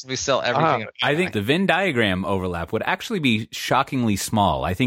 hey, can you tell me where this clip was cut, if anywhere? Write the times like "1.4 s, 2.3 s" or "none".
1.3 s